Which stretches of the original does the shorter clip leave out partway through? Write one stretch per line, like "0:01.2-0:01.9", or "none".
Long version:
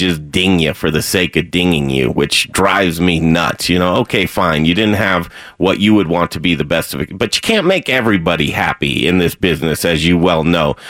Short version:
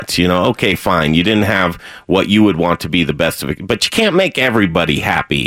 none